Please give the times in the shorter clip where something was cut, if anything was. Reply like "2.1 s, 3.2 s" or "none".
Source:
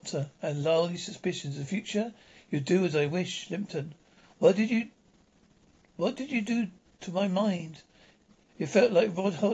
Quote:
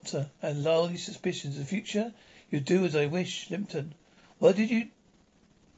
none